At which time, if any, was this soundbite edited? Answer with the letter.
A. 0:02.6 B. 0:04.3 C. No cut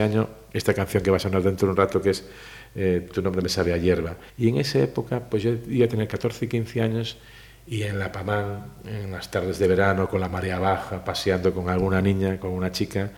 B